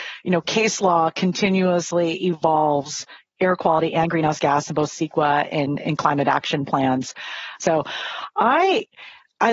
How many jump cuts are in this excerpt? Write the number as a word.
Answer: one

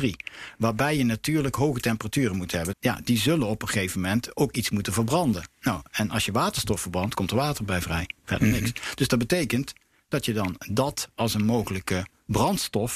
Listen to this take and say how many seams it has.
one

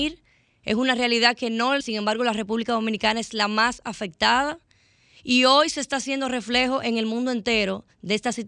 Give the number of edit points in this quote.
one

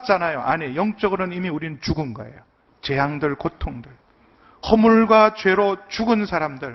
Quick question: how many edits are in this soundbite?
two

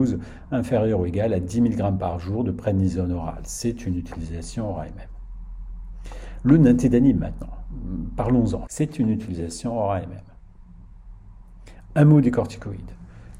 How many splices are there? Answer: one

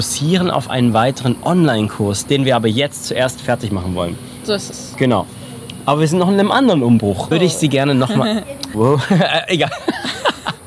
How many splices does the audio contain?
three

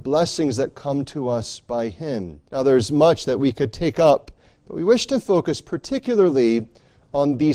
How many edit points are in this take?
one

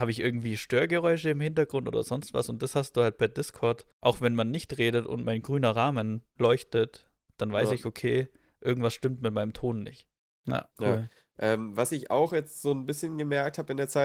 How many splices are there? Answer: two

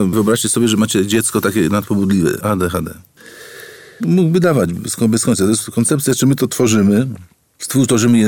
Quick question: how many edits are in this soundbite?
one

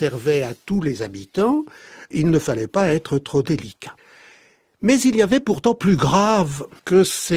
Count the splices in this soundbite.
zero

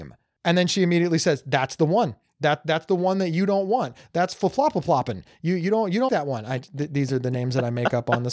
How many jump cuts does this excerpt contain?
one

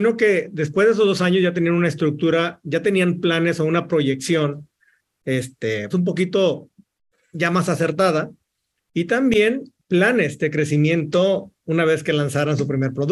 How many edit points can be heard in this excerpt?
one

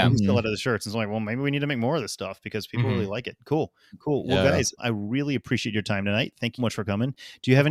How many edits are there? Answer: two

